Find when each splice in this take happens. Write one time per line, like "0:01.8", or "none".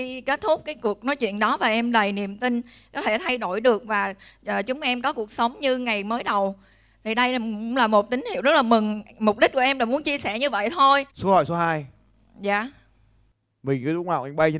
0:11.1